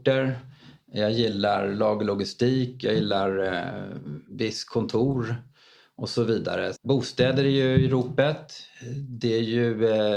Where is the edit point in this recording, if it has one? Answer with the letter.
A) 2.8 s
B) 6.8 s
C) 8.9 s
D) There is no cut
B